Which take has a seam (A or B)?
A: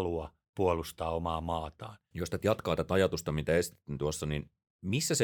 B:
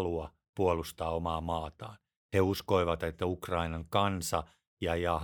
A